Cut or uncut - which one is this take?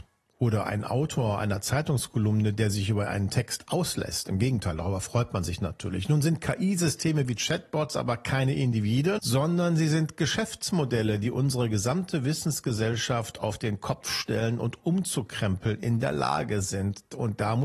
cut